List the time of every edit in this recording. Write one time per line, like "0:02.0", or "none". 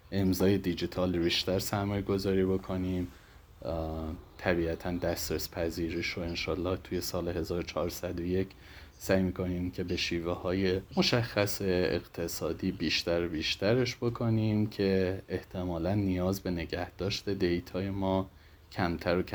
0:01.1
0:10.9